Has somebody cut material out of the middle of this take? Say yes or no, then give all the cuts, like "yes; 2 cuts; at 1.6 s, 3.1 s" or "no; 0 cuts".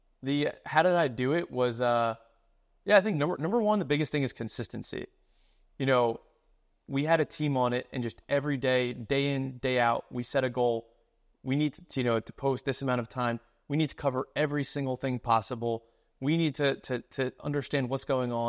no; 0 cuts